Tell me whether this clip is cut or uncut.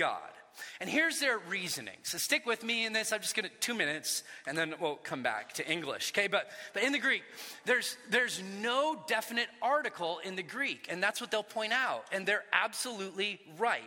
uncut